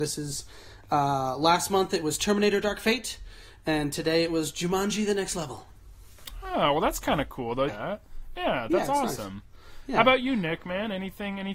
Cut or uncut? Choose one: cut